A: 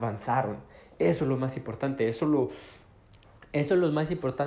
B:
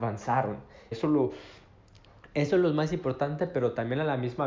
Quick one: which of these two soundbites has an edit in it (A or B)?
B